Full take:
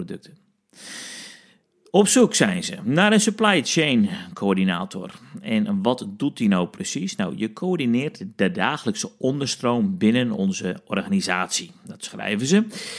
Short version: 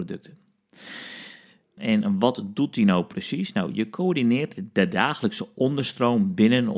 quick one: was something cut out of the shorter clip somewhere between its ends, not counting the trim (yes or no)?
yes